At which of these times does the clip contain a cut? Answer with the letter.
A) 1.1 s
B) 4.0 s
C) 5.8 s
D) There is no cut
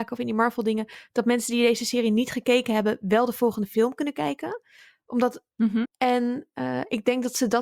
C